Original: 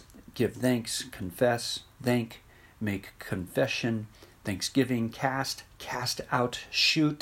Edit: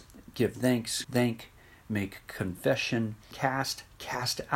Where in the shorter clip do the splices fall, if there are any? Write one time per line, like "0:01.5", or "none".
0:01.0
0:03.3